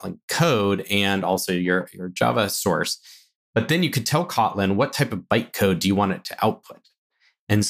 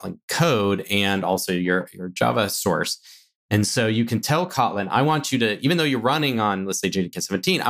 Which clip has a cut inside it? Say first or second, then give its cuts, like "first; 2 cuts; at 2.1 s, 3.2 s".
second; 1 cut; at 3.4 s